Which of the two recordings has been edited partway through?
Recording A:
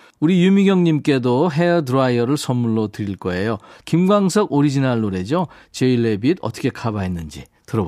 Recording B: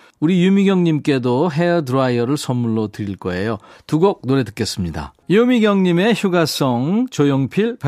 A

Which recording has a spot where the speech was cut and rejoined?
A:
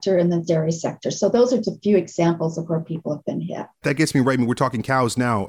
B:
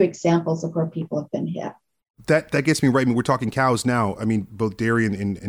A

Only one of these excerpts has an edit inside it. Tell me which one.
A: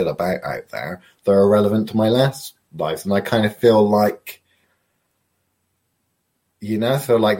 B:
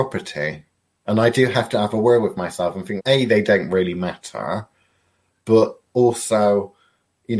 B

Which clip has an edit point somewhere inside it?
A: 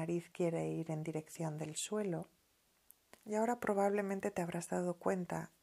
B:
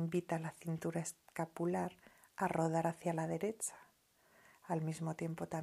A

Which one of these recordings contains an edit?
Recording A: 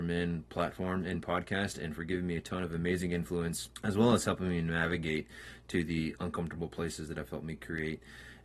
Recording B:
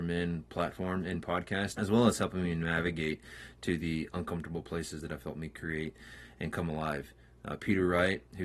B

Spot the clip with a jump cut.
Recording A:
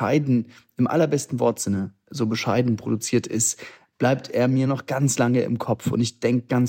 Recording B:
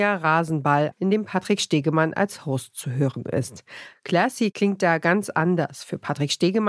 B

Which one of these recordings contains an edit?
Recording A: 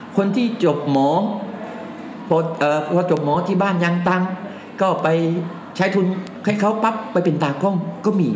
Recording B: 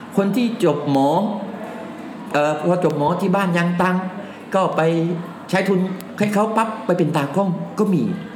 B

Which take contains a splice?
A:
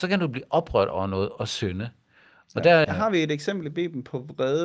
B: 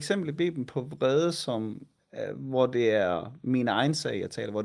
A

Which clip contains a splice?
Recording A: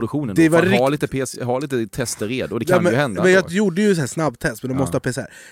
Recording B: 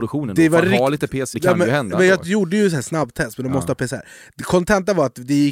B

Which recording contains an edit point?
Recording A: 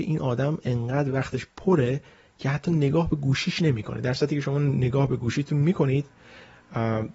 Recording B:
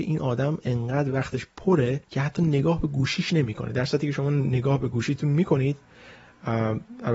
B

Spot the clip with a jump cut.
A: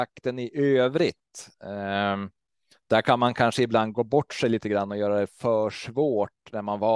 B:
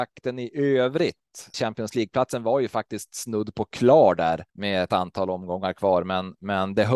B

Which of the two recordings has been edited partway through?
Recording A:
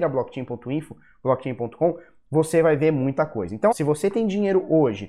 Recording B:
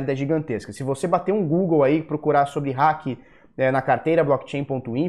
A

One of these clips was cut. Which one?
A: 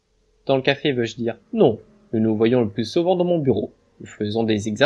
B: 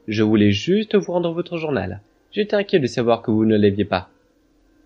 A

